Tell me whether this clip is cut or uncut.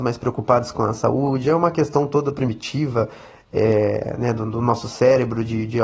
uncut